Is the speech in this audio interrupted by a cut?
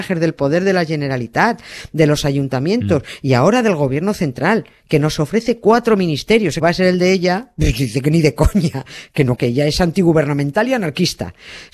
yes; 2 cuts; at 6.6 s, 9.4 s

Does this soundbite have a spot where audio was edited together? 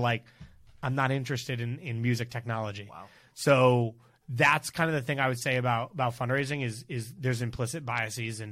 no; 0 cuts

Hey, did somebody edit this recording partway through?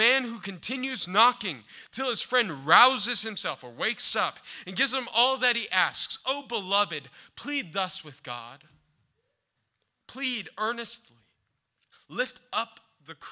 yes; 1 cut; at 11.9 s

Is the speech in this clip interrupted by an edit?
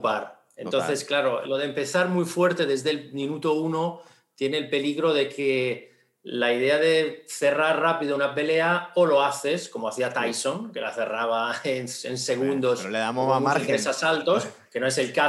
no; 0 cuts

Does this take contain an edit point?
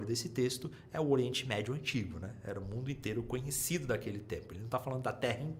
no; 0 cuts

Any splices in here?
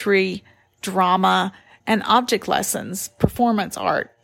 yes; 1 cut; at 1.8 s

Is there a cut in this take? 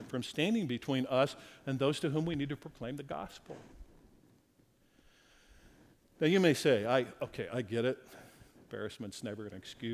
no; 0 cuts

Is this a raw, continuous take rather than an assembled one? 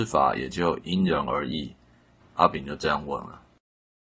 no; 1 cut; at 2.2 s

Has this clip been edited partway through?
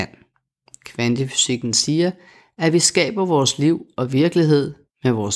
no; 0 cuts

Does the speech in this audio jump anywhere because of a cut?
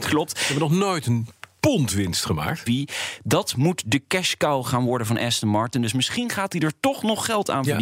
yes; 1 cut; at 2.7 s

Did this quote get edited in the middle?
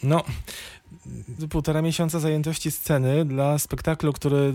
yes; 1 cut; at 1.4 s

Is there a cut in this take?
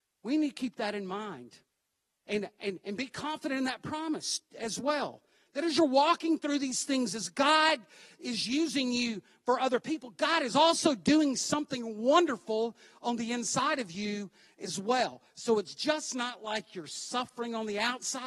no; 0 cuts

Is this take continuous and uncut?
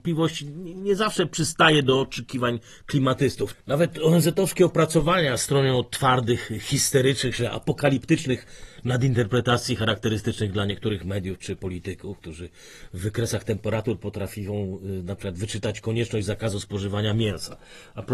no; 1 cut; at 3.5 s

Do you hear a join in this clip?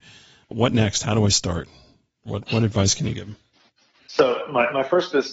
no; 0 cuts

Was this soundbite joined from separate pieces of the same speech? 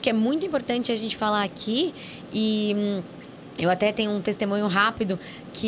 no; 0 cuts

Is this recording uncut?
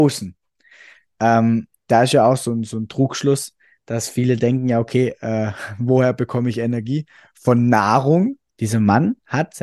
no; 1 cut; at 8.5 s

